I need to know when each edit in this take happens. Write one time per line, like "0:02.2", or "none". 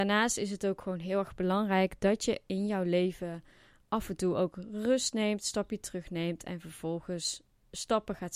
none

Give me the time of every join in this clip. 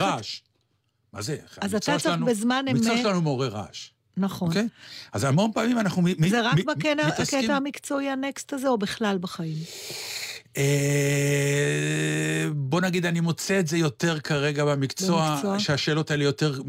none

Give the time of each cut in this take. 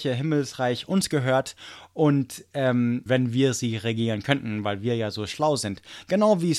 0:03.1

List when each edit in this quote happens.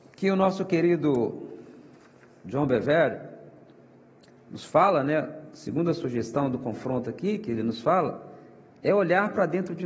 none

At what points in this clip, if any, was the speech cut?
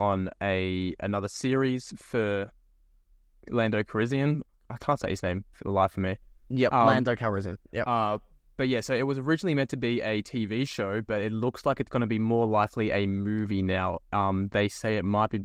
none

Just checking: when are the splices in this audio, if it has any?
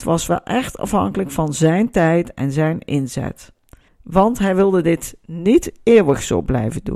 0:03.9

